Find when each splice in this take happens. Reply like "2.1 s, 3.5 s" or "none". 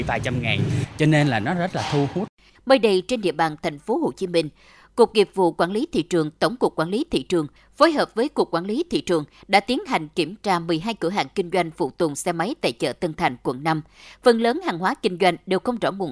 2.5 s